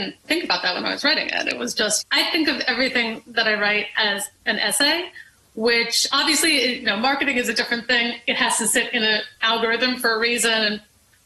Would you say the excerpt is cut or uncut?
cut